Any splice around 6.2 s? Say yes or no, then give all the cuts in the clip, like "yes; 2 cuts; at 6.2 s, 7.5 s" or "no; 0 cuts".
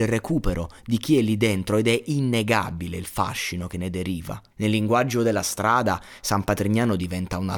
no; 1 cut; at 4.5 s